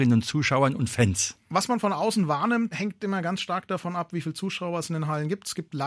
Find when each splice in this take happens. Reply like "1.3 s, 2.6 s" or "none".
1.5 s, 2.7 s